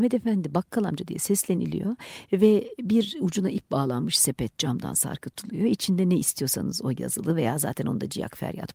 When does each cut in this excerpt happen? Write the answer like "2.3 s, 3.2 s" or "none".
none

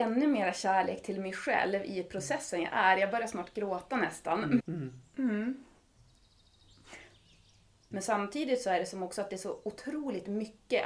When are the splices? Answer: 4.6 s, 7.9 s

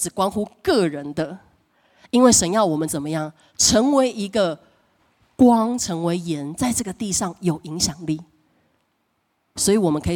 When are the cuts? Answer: none

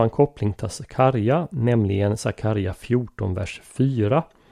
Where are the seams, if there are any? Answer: none

